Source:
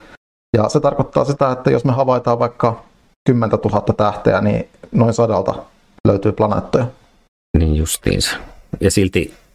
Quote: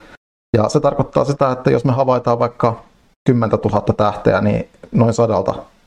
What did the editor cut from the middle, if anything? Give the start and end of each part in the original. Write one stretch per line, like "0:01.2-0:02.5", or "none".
none

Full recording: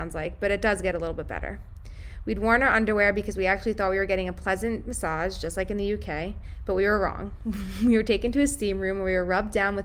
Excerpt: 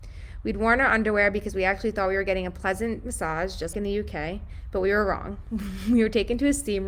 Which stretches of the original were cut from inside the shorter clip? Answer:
0:05.5-0:05.7

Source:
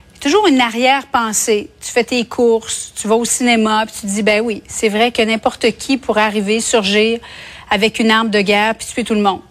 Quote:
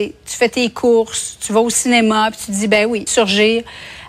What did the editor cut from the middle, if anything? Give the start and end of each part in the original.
0:04.6-0:06.6

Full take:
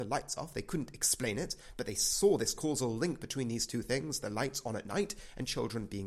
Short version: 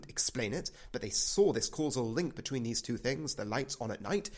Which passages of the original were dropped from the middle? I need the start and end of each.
none

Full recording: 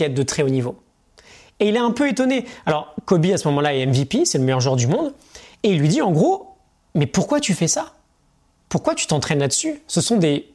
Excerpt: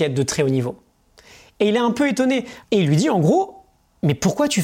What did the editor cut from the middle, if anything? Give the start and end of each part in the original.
0:02.6-0:05.6

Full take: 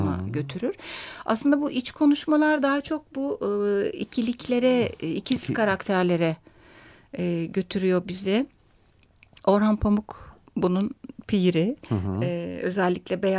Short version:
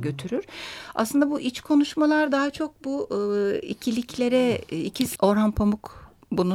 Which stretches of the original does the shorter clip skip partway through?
0:05.5-0:09.4

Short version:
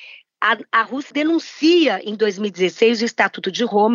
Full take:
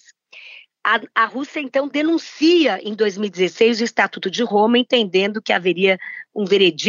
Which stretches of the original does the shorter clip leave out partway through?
0:01.5-0:01.9

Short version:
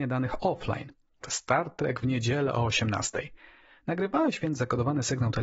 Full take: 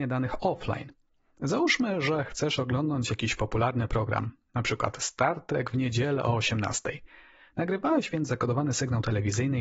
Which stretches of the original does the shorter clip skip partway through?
0:01.2-0:04.9

